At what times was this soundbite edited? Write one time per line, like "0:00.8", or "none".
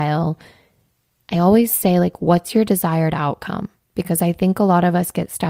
none